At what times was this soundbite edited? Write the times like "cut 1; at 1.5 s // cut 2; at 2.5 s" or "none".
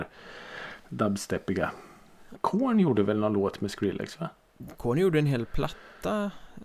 cut 1; at 2.4 s

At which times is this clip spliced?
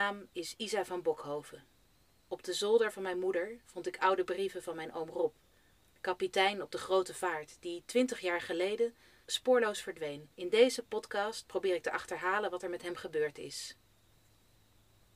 cut 1; at 9.2 s // cut 2; at 10.3 s

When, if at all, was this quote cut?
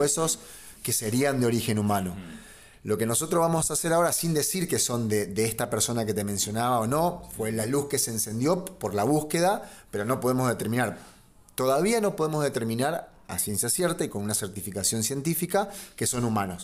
none

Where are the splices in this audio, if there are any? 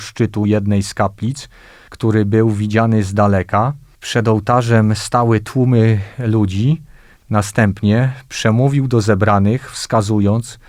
cut 1; at 7.1 s

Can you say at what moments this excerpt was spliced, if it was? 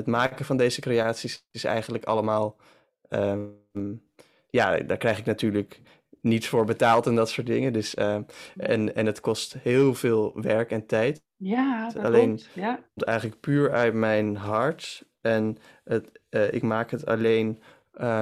none

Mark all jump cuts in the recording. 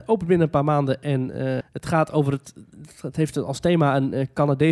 cut 1; at 1.6 s

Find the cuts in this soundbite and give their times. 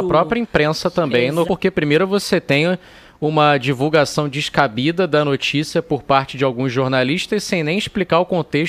cut 1; at 1.5 s

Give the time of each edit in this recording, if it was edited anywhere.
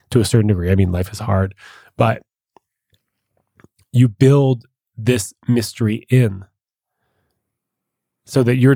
none

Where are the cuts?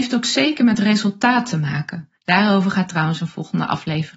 cut 1; at 2.2 s

